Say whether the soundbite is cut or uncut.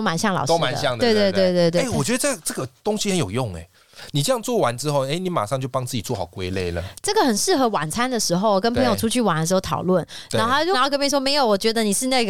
cut